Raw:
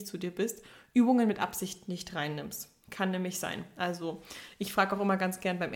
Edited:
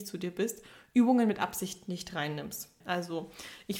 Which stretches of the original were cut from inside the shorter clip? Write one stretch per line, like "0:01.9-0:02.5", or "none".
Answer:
0:02.8-0:03.7